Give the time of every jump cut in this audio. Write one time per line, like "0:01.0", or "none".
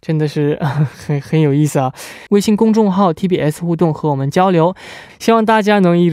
0:02.3
0:05.1